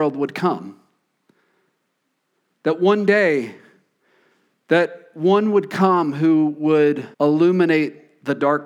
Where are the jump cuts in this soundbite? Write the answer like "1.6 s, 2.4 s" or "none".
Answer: 7.1 s